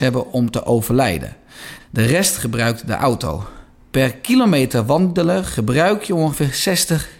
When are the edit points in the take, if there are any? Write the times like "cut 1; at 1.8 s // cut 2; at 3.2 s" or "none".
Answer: cut 1; at 1.8 s